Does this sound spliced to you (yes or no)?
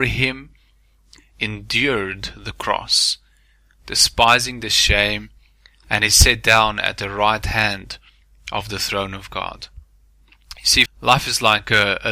yes